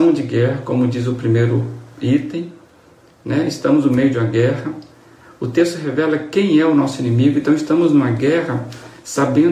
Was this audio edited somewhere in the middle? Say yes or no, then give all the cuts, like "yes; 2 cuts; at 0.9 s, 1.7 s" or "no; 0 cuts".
no; 0 cuts